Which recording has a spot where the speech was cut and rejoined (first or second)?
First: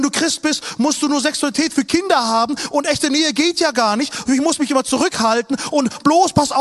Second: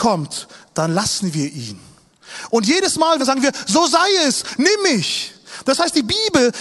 second